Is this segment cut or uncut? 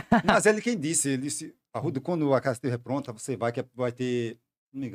uncut